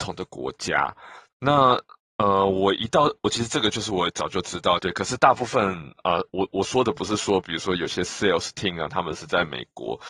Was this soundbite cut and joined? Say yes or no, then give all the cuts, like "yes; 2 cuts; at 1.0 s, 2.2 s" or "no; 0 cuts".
yes; 2 cuts; at 1.3 s, 4.8 s